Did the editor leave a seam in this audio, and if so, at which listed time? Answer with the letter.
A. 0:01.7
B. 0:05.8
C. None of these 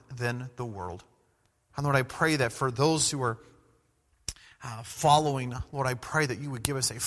A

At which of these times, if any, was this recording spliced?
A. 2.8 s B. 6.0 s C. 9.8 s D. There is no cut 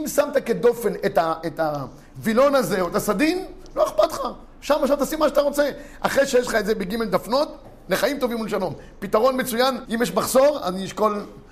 C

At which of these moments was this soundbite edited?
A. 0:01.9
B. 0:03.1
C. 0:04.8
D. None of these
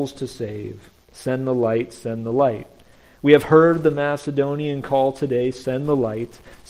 D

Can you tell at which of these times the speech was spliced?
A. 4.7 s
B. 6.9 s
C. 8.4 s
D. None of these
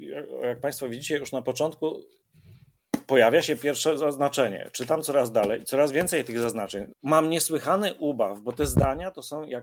B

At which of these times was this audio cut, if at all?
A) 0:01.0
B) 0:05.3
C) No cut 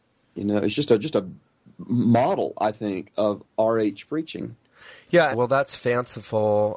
B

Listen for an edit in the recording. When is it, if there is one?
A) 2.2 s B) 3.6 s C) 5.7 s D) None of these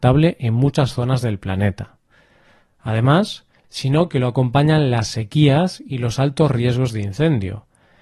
B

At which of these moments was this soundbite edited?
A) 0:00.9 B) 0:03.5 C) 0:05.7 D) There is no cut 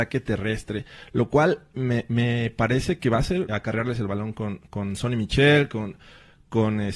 B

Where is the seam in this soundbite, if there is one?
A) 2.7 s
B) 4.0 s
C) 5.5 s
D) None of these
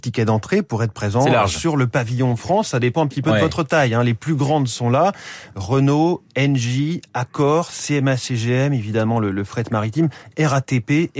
D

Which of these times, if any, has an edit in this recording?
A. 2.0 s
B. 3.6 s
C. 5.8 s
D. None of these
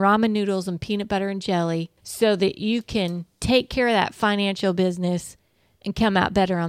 A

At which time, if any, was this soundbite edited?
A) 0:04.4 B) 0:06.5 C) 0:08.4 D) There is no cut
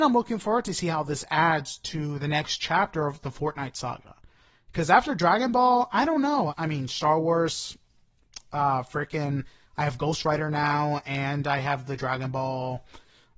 B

